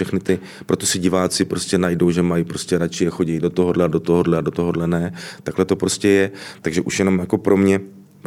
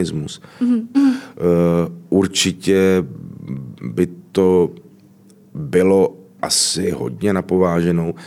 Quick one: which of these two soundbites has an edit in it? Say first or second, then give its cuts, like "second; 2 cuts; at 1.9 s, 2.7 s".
second; 1 cut; at 0.9 s